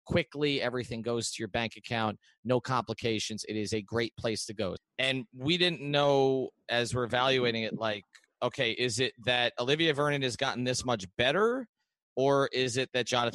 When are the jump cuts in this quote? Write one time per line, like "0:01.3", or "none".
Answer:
0:04.8